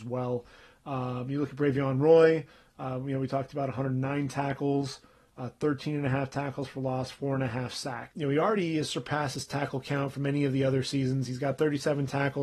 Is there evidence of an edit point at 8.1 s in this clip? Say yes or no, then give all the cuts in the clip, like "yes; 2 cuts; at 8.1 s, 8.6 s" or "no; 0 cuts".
yes; 1 cut; at 8.1 s